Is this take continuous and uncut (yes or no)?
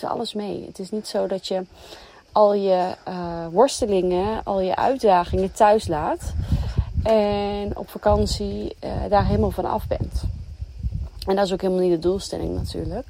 yes